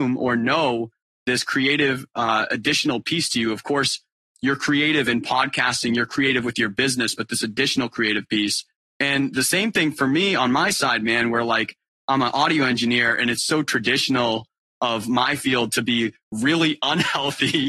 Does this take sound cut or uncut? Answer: uncut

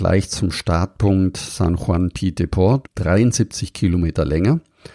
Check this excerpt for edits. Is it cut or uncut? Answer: cut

